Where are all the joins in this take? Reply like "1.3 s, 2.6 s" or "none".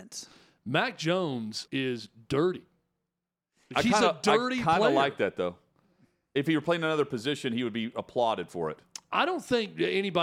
1.7 s